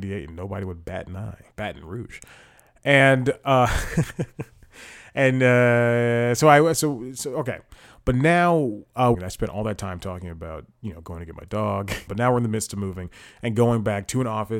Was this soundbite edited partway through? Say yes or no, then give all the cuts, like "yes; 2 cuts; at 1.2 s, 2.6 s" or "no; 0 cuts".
yes; 3 cuts; at 1.5 s, 9.1 s, 12.1 s